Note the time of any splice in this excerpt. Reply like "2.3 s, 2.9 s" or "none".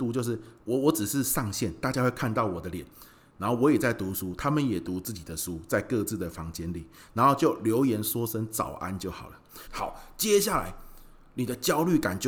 9.7 s

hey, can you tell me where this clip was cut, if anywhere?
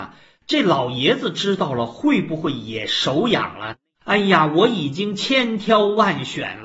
4.0 s

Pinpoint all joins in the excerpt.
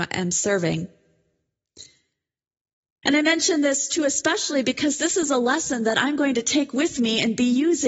3.0 s

